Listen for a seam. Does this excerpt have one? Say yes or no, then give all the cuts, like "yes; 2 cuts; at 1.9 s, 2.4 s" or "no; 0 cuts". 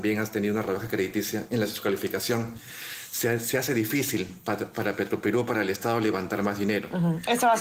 no; 0 cuts